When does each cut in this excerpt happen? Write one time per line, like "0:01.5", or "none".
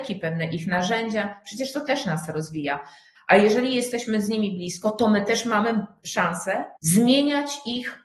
0:03.2
0:06.8